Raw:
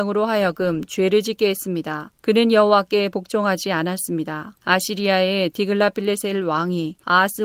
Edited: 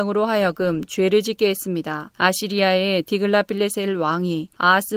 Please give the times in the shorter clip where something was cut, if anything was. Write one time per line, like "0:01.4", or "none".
0:02.1